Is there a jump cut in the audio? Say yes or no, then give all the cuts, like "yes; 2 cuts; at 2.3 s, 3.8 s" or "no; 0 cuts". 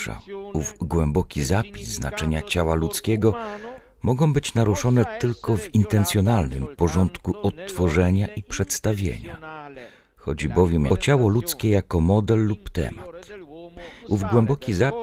yes; 2 cuts; at 10.9 s, 14.0 s